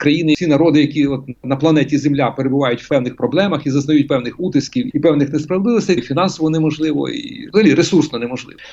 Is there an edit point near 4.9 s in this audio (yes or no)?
yes